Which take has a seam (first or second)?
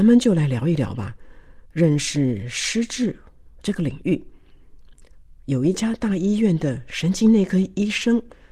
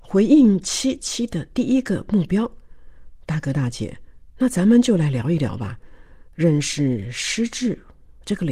second